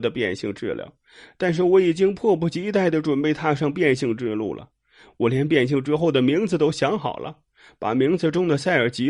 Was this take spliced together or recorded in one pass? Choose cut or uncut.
uncut